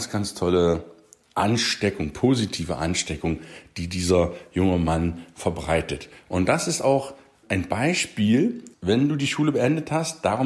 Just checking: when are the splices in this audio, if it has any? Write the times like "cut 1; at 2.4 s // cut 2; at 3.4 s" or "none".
cut 1; at 7.4 s // cut 2; at 8.7 s